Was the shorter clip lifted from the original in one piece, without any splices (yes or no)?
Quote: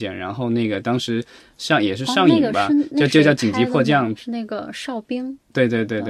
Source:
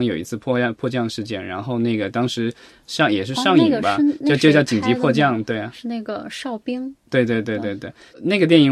no